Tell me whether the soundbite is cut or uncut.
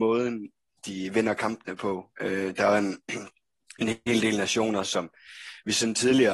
uncut